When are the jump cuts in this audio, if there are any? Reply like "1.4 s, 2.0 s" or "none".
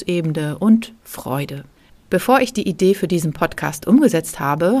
1.9 s